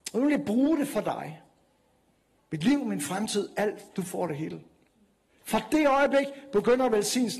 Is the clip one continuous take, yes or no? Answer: no